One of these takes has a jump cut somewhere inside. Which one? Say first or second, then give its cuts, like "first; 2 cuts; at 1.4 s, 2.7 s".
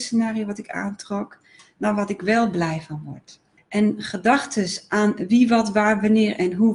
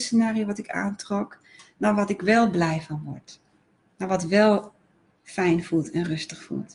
first; 1 cut; at 3.6 s